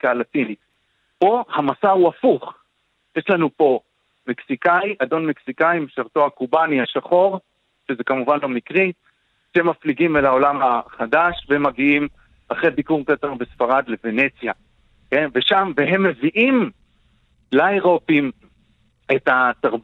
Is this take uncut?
yes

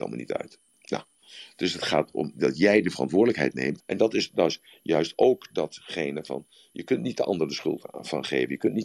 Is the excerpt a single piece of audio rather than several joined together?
no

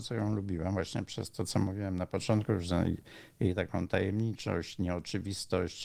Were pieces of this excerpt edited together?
no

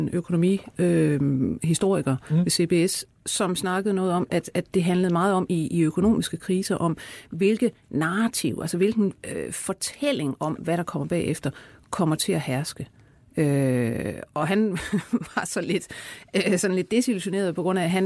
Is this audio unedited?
yes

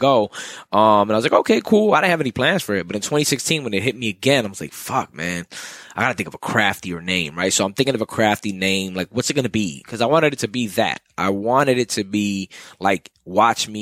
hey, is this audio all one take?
yes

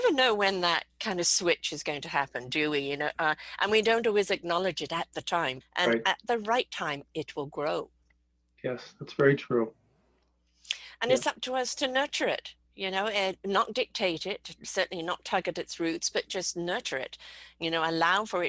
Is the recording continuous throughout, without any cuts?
no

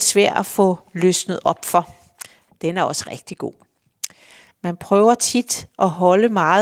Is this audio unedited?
no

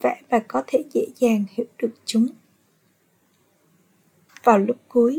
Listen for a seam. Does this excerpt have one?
yes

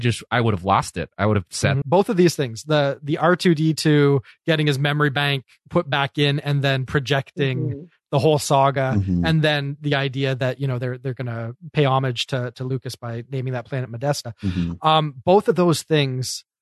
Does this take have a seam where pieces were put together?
yes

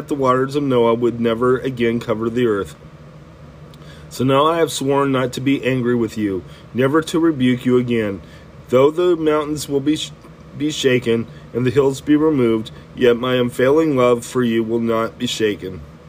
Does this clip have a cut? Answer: no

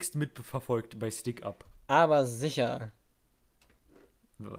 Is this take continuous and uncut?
yes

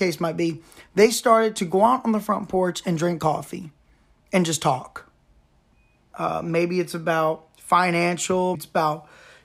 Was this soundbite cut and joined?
yes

